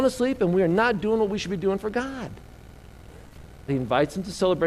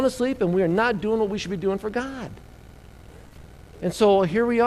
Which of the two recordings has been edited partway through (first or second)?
first